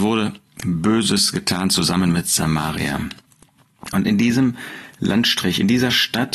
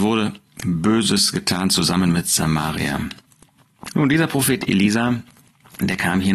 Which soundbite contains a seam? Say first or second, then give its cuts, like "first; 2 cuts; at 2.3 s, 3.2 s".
second; 1 cut; at 3.9 s